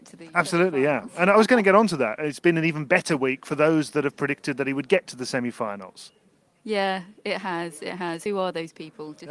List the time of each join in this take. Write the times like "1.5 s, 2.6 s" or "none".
none